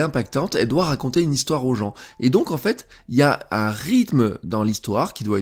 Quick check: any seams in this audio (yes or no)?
no